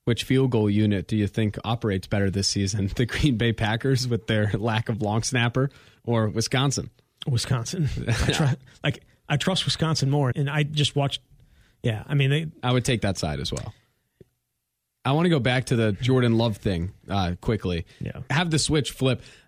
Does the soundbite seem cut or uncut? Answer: cut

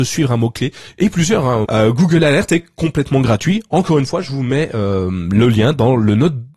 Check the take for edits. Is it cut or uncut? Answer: cut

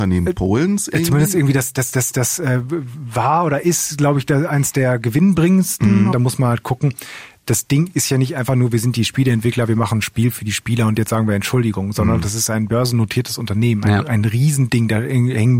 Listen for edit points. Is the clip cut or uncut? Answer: cut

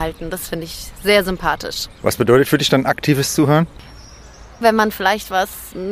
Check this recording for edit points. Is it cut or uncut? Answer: cut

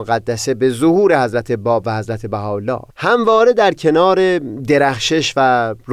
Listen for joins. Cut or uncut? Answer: cut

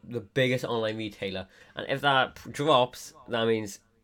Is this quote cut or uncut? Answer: cut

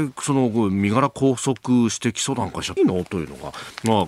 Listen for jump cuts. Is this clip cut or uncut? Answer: cut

